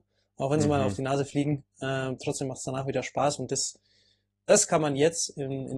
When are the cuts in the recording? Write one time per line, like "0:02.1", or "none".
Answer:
none